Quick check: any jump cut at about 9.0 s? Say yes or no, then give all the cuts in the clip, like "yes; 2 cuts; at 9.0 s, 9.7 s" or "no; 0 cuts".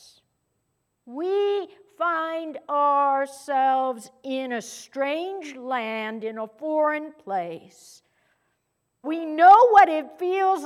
yes; 2 cuts; at 0.9 s, 9.0 s